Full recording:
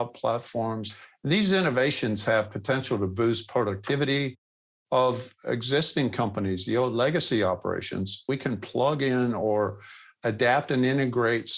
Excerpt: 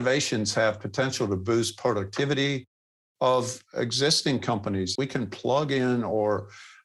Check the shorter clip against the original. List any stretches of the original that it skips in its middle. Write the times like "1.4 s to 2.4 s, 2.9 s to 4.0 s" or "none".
6.7 s to 8.3 s